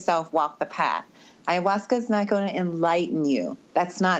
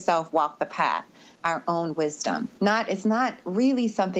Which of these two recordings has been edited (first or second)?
second